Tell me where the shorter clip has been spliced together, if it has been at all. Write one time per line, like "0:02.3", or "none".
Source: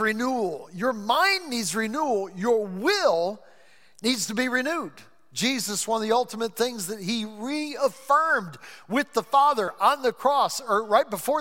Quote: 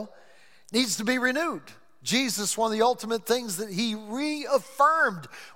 none